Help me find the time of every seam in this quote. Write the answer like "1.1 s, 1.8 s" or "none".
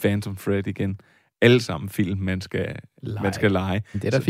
none